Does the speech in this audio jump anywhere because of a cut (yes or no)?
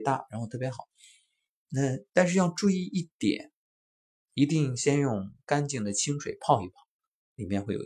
no